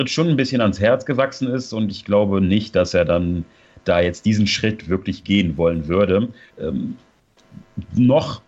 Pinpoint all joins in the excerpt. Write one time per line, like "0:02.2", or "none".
0:06.5